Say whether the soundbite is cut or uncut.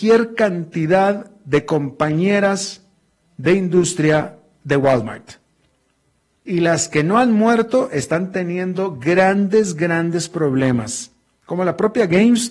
cut